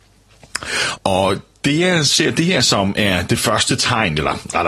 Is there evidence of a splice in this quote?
yes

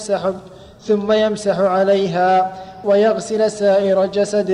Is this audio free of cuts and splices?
no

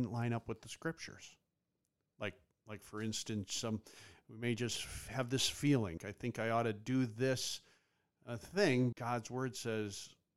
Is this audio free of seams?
no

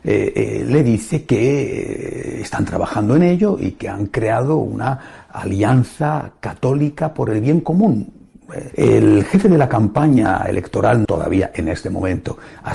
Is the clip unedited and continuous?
no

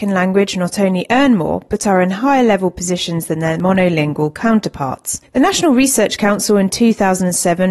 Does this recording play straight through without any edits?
no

